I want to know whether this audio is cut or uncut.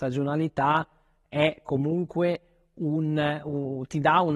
uncut